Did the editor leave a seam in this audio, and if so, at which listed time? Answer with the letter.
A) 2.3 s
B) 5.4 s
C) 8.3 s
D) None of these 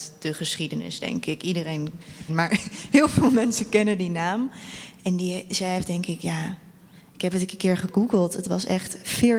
A